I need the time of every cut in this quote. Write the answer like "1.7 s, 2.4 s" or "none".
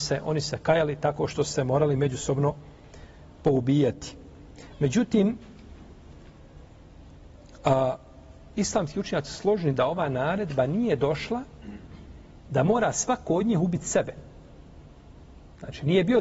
none